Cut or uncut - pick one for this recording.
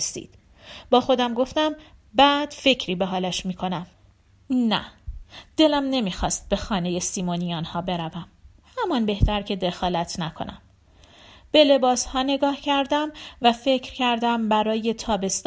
uncut